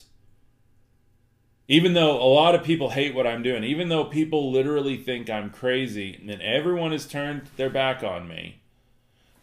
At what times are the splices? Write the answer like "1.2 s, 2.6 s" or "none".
none

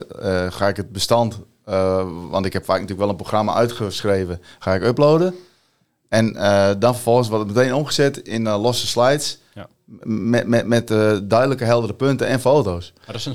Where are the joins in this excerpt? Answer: none

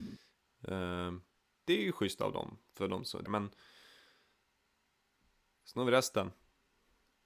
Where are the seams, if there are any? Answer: 1.4 s, 3.3 s

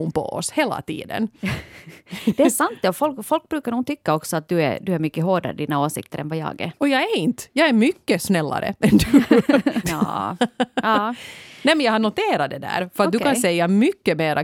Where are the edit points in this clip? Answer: 9.8 s

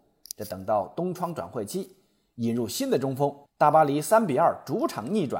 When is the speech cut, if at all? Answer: 3.5 s

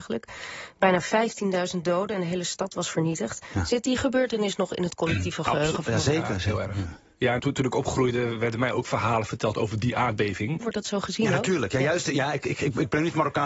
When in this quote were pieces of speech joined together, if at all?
7.4 s, 10.6 s

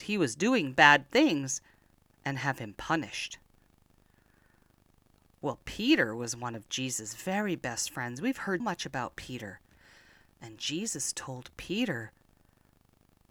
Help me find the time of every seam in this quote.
8.6 s

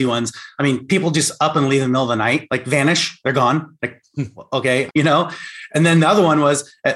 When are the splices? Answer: 4.9 s

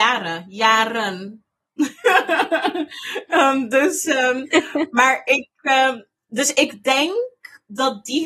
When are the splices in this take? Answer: none

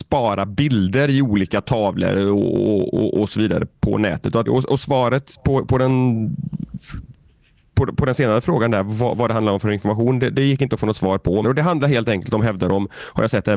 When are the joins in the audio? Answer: 4.5 s, 11.4 s

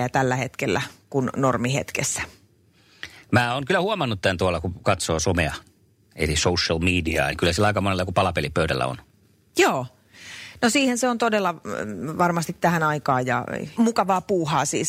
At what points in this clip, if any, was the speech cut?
7.3 s, 13.8 s

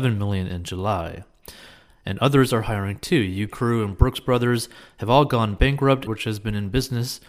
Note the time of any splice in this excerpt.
3.5 s, 6.1 s

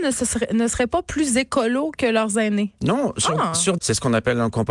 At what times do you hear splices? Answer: 3.8 s

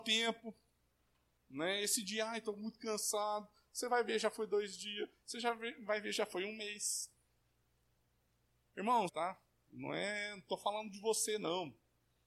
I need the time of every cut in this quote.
9.1 s

